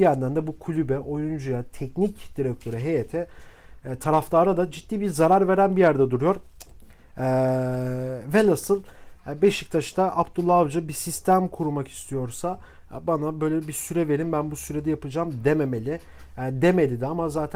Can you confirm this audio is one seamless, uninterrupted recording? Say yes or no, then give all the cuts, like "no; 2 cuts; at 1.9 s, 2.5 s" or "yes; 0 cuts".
yes; 0 cuts